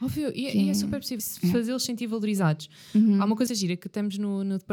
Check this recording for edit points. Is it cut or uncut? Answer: cut